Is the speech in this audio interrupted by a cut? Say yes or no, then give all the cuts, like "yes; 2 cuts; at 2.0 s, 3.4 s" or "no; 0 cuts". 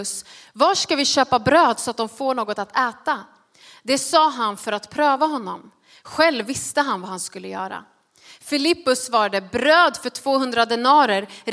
no; 0 cuts